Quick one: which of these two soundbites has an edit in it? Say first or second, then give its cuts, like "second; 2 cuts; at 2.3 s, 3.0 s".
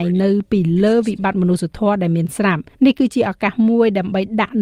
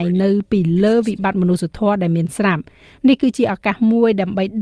first; 1 cut; at 2.7 s